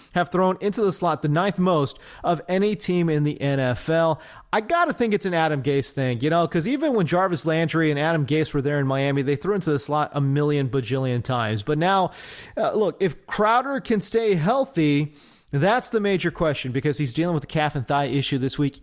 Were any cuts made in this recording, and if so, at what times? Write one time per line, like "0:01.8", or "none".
none